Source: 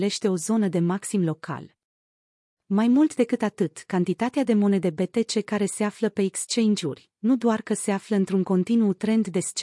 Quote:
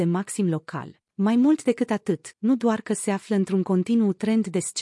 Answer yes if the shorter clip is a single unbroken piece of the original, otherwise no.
no